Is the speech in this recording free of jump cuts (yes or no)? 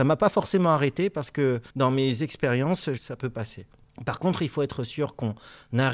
no